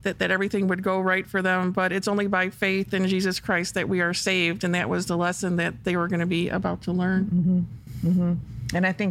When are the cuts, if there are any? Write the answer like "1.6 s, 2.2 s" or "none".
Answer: none

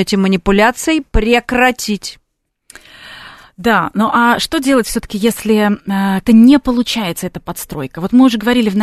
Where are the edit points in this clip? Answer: 6.2 s

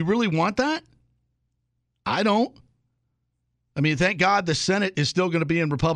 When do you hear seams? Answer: none

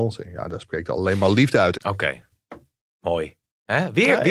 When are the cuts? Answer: 1.7 s

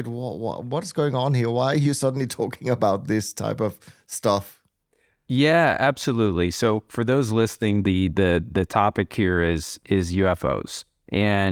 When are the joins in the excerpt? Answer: none

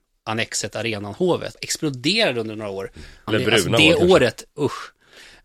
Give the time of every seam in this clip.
1.5 s, 3.3 s

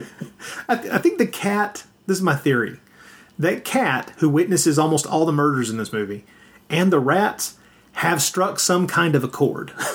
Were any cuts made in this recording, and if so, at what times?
none

